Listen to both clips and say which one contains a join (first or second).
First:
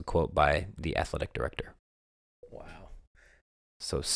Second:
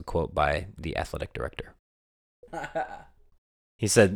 second